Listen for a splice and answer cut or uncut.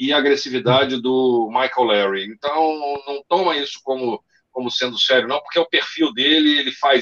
uncut